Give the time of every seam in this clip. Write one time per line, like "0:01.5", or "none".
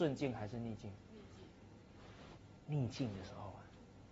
none